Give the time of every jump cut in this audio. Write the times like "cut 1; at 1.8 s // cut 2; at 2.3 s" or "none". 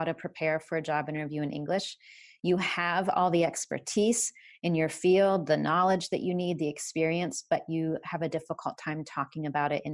none